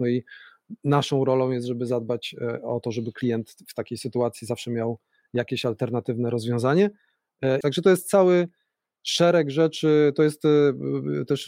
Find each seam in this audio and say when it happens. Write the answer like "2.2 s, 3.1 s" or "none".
7.6 s